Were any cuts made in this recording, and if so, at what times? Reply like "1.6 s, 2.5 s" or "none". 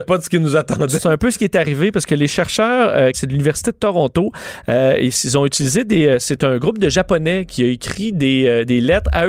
3.1 s